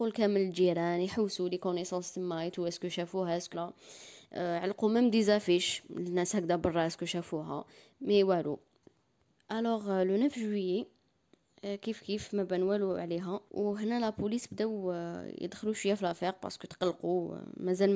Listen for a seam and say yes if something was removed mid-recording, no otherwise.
yes